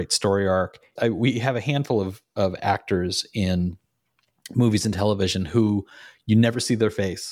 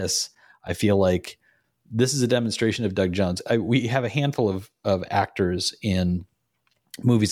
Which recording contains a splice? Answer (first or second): first